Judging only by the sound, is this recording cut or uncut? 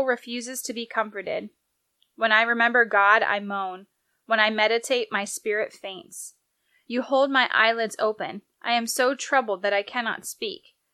uncut